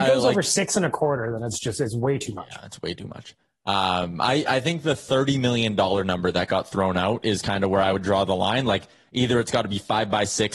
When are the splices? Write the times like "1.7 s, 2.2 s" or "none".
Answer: none

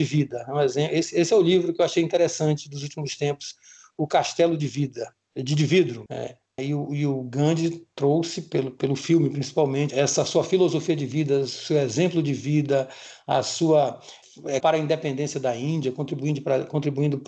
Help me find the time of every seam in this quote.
6.6 s, 9.9 s, 14.6 s

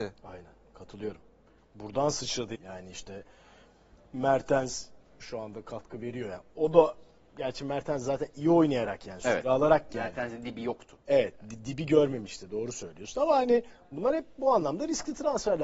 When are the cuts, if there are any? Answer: 2.5 s

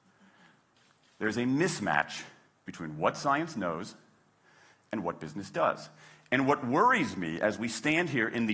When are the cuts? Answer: none

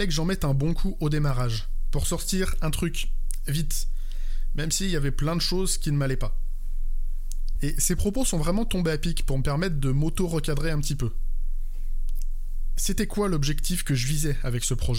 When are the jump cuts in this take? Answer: 7.6 s

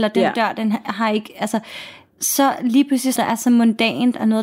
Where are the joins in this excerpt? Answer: 3.2 s

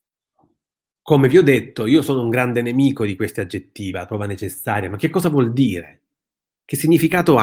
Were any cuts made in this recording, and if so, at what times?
3.9 s

